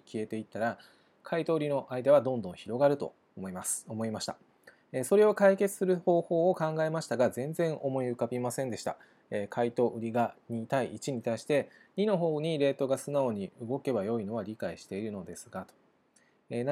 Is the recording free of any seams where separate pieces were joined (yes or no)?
yes